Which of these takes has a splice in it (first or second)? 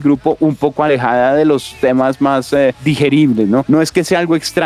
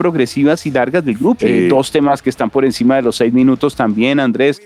second